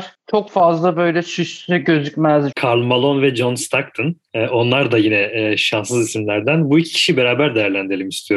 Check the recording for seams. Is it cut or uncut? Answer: cut